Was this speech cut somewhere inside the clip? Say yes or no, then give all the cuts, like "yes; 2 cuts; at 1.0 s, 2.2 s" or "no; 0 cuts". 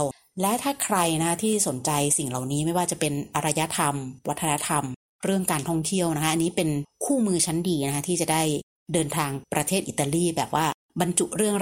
yes; 1 cut; at 9.4 s